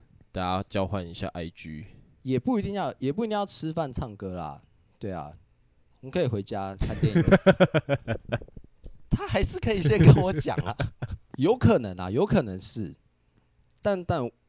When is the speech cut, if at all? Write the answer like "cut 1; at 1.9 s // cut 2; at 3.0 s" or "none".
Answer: cut 1; at 9.1 s

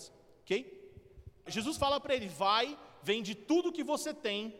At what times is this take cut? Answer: cut 1; at 1.5 s

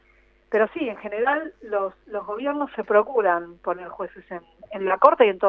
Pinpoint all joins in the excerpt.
none

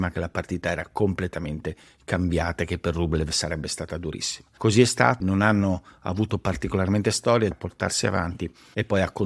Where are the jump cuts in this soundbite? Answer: cut 1; at 5.2 s // cut 2; at 7.5 s

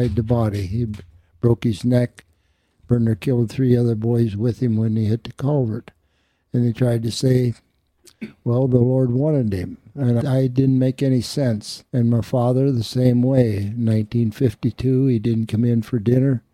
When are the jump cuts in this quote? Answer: cut 1; at 10.2 s // cut 2; at 11.9 s

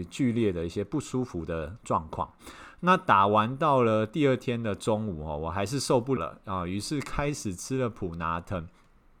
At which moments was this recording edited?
cut 1; at 6.2 s

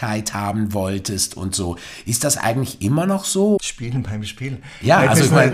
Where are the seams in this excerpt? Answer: cut 1; at 3.6 s

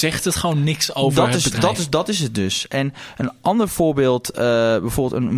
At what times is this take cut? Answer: none

